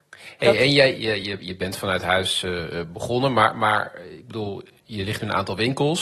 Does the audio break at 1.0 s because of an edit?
yes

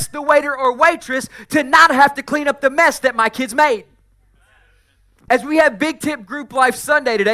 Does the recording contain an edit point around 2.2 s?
no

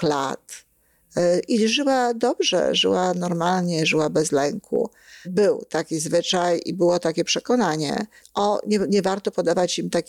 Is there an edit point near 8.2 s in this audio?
yes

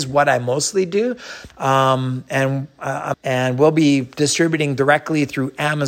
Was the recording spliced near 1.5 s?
yes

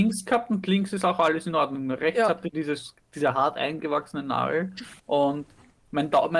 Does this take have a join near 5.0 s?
yes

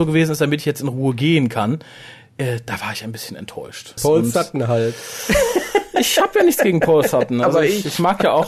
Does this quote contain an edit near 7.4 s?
no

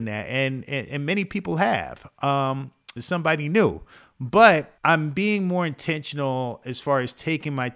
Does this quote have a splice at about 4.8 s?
yes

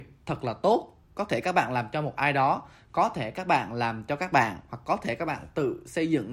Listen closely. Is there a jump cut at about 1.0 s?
yes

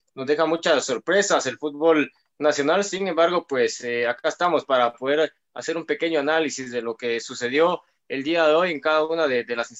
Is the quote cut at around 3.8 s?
no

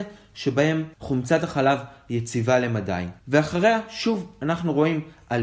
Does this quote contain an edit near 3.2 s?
yes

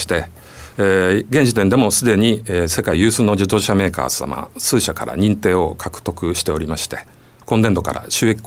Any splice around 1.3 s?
no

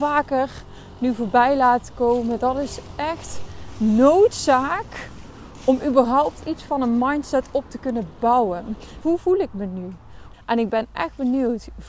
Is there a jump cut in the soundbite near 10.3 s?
yes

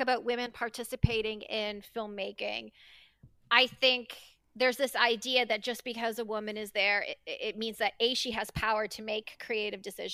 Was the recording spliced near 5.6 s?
no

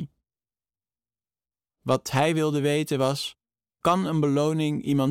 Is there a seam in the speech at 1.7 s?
yes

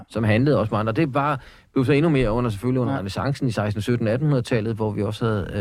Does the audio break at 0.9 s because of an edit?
no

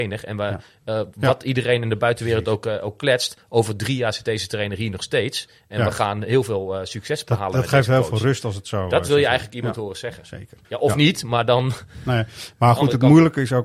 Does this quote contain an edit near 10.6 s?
yes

